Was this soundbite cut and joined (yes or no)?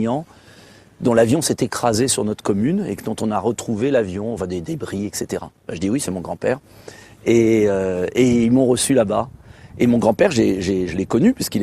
no